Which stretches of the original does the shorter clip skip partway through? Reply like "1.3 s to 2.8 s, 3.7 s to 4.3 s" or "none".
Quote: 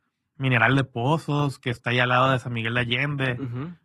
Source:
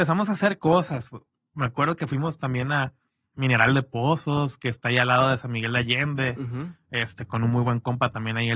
none